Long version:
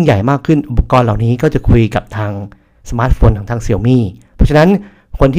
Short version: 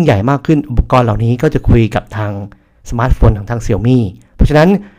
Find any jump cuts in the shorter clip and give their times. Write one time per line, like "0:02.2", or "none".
none